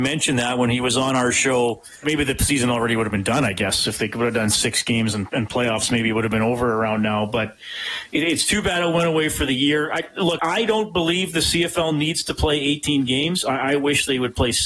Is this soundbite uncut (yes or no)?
no